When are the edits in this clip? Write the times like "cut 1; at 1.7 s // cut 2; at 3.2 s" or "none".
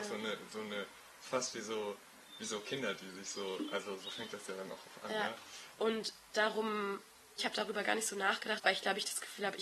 cut 1; at 5.7 s // cut 2; at 7.4 s // cut 3; at 8.6 s